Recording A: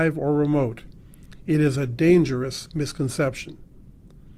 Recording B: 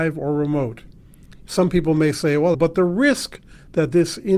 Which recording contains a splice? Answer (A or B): B